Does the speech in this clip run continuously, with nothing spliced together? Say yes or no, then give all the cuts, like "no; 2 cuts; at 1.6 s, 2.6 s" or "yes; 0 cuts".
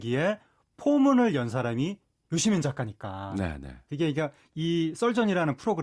yes; 0 cuts